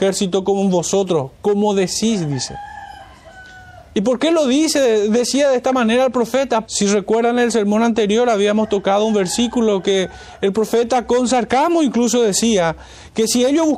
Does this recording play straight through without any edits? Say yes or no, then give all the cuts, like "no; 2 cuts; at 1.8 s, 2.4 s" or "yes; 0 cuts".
no; 1 cut; at 6.6 s